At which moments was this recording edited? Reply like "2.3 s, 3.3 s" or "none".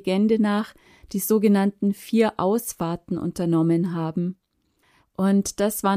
5.0 s

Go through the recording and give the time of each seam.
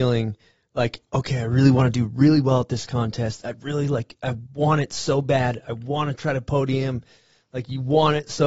none

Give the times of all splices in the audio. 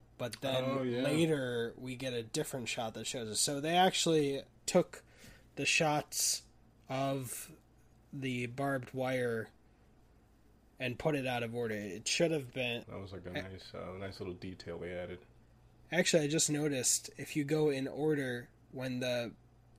12.8 s

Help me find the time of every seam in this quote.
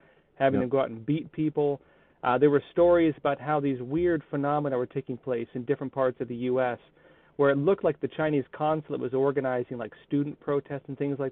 none

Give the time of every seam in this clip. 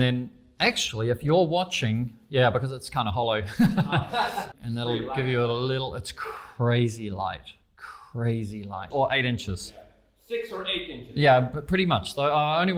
4.5 s, 8.9 s

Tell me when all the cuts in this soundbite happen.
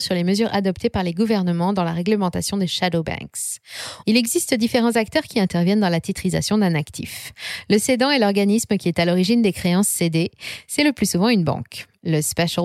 4.0 s

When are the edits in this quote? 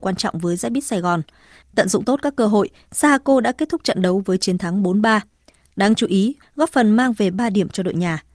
1.6 s, 6.4 s

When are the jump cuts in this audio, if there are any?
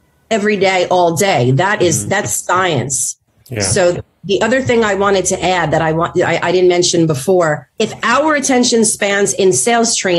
none

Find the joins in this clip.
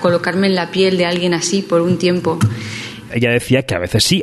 3.1 s

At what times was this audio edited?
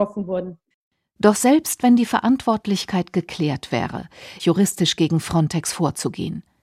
4.4 s

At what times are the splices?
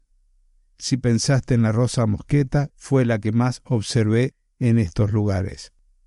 2.7 s

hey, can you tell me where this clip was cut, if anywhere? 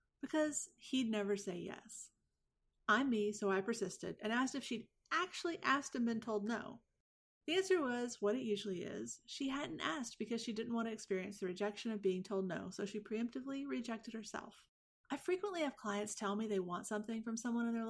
15.0 s

